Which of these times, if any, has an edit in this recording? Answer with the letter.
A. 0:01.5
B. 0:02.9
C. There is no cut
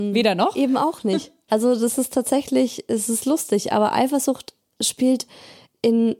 A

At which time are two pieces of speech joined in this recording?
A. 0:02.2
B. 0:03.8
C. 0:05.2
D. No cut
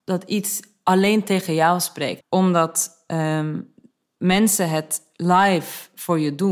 A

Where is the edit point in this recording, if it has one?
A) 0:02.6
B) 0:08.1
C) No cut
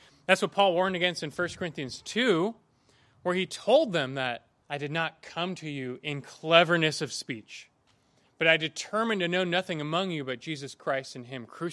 C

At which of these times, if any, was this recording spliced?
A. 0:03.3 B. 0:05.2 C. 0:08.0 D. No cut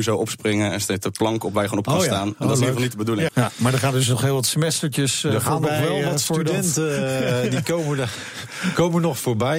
A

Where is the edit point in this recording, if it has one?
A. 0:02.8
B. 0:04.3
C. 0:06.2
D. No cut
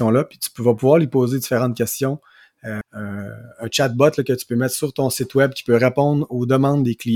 A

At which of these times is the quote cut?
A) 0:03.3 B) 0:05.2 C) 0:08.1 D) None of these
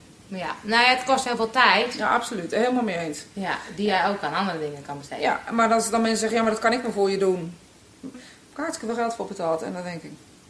C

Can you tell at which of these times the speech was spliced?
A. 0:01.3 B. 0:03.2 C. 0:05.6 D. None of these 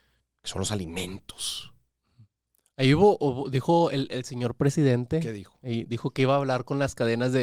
D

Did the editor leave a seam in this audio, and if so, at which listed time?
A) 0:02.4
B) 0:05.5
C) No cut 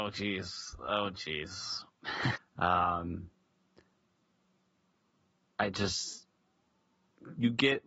A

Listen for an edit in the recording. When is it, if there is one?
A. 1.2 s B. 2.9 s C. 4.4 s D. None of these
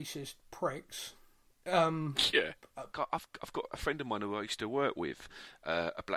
B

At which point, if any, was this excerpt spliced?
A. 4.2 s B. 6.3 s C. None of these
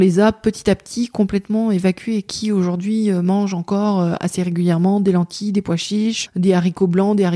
B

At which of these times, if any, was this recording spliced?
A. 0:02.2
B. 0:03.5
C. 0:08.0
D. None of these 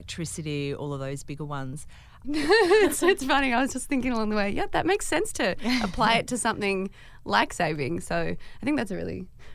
A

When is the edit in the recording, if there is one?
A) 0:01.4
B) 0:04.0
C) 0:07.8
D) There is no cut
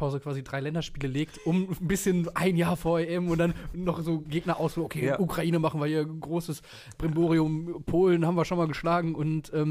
D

